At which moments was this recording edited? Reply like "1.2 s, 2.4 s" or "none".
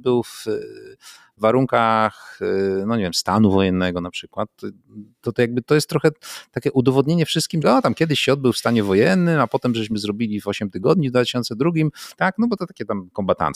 7.6 s, 12.2 s